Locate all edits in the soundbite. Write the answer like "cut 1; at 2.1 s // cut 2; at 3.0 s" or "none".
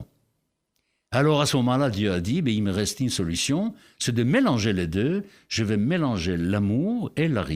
none